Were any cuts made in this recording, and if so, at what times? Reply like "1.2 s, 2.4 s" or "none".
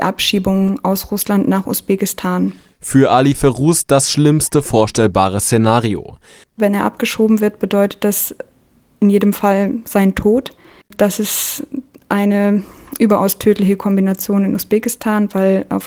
6.4 s, 10.8 s